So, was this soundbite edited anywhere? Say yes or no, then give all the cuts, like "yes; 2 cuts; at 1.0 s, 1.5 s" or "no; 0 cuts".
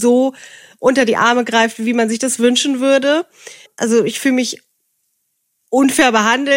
yes; 1 cut; at 3.7 s